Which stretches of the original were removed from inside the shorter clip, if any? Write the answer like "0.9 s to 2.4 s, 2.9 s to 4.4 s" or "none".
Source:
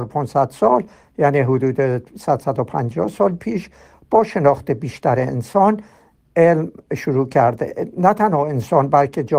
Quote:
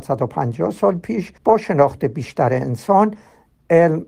3.7 s to 4.0 s